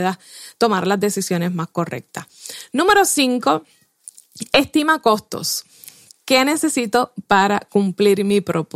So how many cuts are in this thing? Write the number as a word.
one